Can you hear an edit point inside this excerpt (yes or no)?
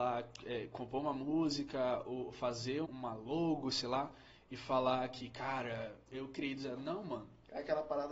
yes